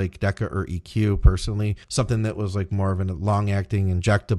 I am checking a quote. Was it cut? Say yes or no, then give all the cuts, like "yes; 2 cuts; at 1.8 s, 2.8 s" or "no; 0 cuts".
yes; 1 cut; at 1.8 s